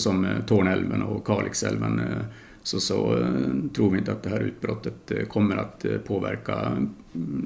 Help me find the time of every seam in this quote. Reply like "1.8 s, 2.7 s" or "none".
none